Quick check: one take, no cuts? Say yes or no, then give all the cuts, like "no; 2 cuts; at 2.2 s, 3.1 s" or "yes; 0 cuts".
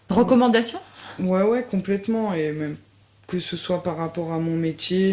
yes; 0 cuts